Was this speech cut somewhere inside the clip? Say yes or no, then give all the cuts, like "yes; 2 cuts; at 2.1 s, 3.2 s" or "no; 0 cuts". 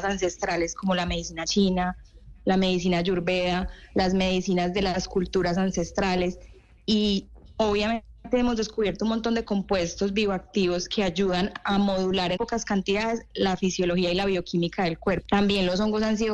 yes; 2 cuts; at 12.3 s, 15.2 s